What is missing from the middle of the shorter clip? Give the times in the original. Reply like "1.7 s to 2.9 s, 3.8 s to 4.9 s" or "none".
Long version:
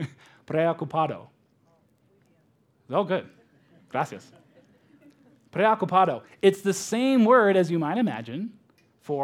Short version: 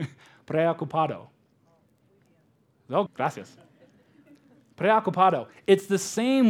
3.1 s to 3.8 s